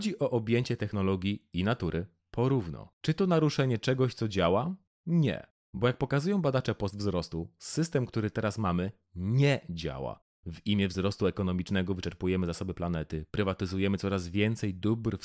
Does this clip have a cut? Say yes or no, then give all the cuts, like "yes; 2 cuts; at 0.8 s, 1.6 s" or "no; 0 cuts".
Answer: yes; 1 cut; at 2.9 s